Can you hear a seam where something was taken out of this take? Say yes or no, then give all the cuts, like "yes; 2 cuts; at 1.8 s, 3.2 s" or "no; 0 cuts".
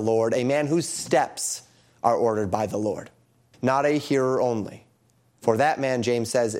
yes; 1 cut; at 3.5 s